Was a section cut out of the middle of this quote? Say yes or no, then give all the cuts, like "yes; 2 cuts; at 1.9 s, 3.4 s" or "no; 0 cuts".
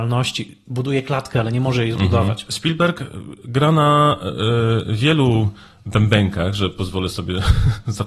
yes; 1 cut; at 2.5 s